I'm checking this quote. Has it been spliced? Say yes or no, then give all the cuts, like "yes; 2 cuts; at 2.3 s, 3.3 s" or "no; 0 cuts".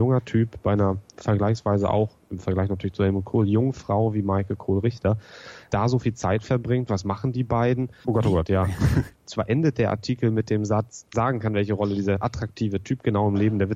yes; 3 cuts; at 8.0 s, 9.1 s, 11.1 s